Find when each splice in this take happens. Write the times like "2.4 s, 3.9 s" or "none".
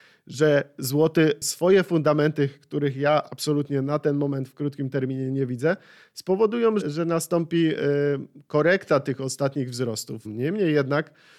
6.8 s, 10.2 s